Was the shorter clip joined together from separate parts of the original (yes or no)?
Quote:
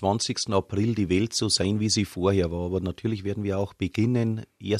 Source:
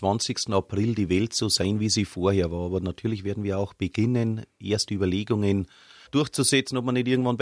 no